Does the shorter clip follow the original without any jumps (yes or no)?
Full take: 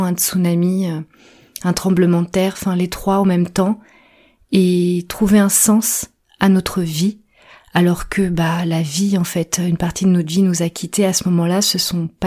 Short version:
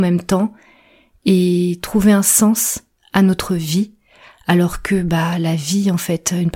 yes